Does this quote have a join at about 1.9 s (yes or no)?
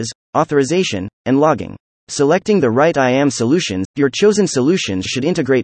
yes